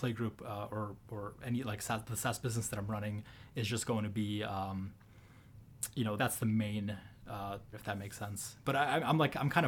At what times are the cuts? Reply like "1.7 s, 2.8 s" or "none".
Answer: 6.2 s, 7.7 s

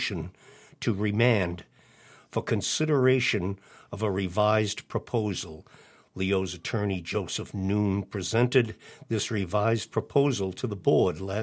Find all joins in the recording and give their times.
none

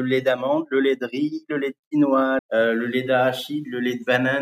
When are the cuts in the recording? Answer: 2.4 s

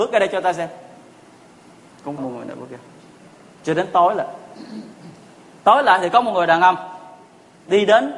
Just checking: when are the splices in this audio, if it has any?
2.2 s

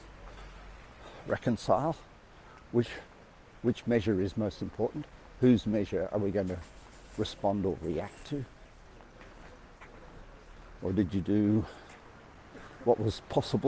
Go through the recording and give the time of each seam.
10.8 s

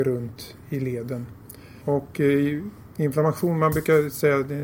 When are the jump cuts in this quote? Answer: 1.8 s

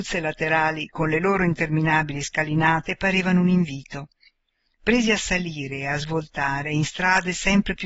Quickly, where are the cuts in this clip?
none

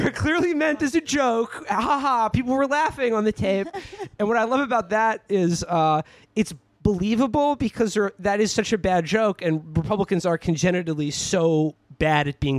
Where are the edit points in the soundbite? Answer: none

